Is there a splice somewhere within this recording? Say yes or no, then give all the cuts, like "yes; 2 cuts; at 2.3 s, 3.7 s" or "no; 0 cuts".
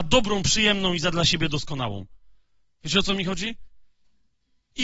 no; 0 cuts